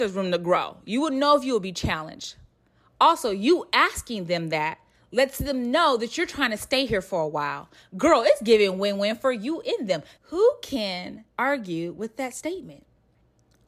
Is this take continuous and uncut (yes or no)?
no